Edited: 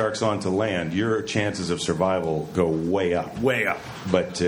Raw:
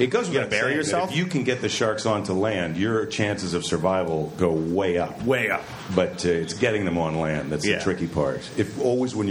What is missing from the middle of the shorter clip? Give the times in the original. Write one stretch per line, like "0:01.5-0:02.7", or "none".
none